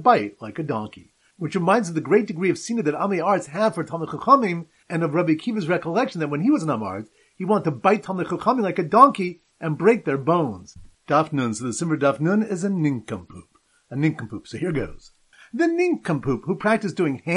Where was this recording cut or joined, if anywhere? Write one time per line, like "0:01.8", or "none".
0:15.4